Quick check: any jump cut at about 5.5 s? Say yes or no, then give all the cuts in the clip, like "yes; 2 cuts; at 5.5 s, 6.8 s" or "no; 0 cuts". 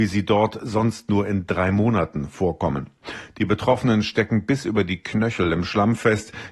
no; 1 cut; at 3.3 s